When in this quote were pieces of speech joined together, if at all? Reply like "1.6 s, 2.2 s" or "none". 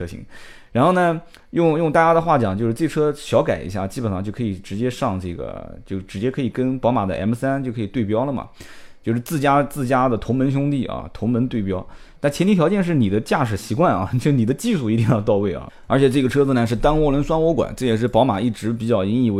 12.2 s